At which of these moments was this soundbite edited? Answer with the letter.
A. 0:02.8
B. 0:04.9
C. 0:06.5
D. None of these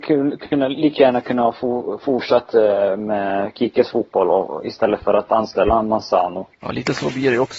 C